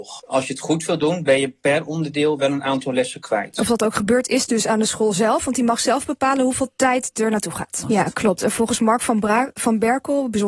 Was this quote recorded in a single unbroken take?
no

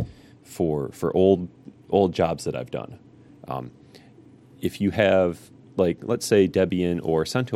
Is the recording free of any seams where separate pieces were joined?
yes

